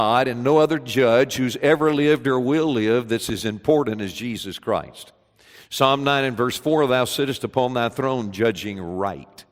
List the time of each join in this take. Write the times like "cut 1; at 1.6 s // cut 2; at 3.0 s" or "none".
none